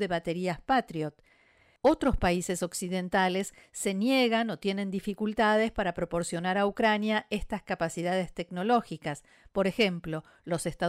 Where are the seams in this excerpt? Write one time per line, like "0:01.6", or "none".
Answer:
0:01.8